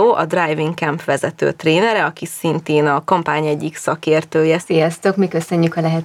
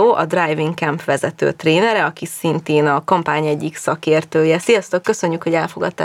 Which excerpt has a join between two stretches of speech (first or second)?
first